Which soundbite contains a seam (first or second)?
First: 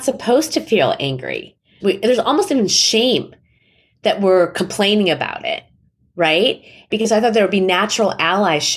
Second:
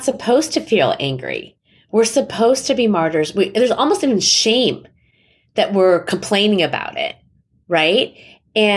first